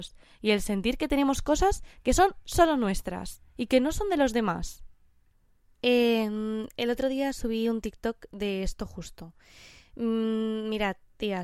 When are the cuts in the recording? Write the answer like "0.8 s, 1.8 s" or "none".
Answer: 5.7 s